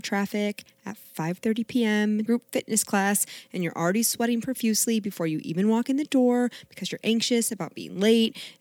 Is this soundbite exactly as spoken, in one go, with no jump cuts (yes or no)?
no